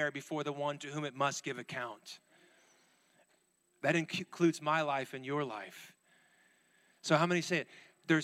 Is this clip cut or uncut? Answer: cut